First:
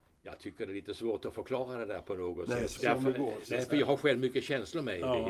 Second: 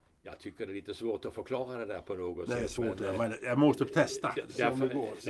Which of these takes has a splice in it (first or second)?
first